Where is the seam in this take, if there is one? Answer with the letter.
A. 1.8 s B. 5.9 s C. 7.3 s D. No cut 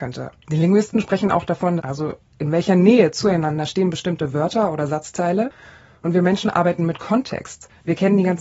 A